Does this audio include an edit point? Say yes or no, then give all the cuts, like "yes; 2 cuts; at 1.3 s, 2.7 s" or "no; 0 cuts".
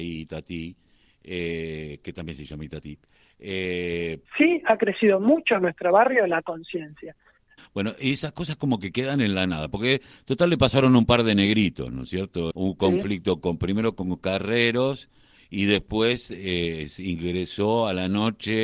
yes; 3 cuts; at 4.2 s, 7.6 s, 12.5 s